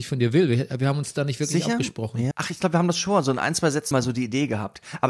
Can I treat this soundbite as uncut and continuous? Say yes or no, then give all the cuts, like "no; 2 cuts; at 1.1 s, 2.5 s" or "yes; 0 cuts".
no; 2 cuts; at 2.3 s, 3.9 s